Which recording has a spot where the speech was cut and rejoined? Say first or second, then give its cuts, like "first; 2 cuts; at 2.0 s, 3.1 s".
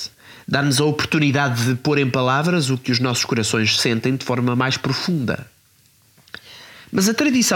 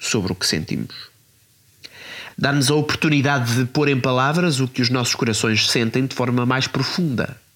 second; 1 cut; at 2.3 s